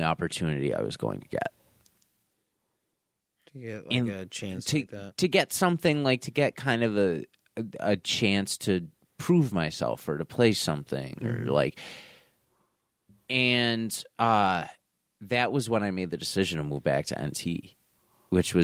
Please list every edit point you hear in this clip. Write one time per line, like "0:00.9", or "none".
none